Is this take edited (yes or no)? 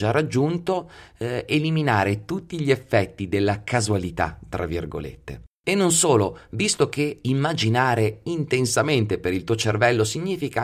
no